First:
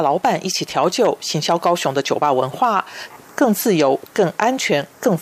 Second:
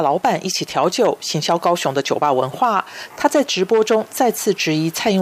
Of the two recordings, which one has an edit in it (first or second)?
first